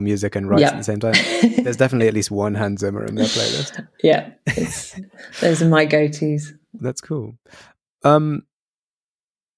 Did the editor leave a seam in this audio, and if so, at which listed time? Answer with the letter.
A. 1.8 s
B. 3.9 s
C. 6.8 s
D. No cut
C